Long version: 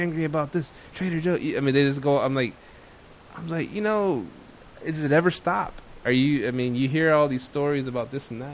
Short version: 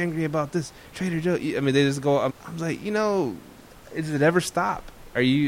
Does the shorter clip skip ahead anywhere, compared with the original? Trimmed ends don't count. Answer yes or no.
yes